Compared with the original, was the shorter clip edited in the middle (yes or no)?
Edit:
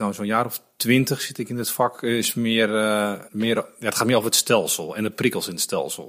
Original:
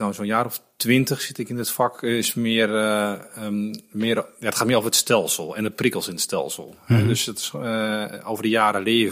yes